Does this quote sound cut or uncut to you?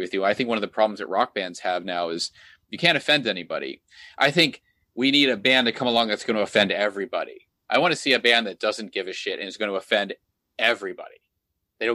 cut